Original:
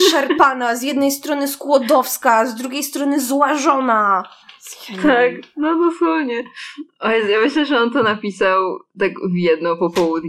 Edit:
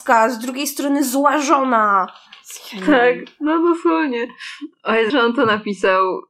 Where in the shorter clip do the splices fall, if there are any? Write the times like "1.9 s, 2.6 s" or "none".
5.1 s

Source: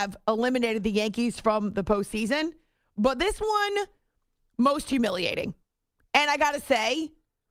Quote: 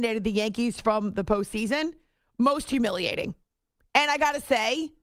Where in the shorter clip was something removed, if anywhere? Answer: 2.3 s

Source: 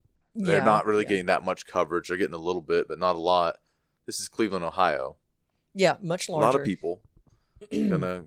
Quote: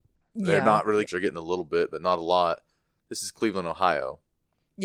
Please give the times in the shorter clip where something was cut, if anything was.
1.1 s

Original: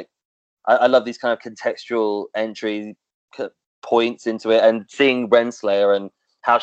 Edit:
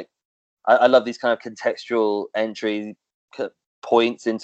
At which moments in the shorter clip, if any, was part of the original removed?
none

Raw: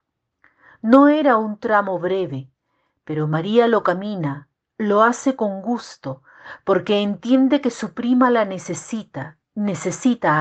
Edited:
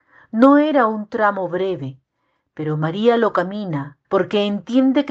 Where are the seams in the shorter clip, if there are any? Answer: 4.0 s

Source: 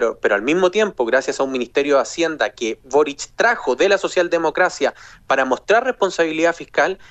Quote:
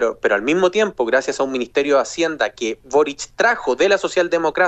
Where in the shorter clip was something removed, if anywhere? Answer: none

